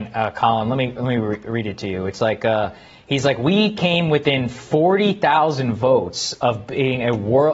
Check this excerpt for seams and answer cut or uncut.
uncut